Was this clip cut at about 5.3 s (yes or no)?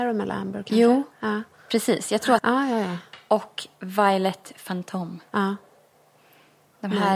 no